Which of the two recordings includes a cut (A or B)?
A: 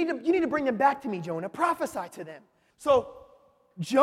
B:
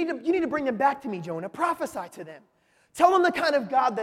A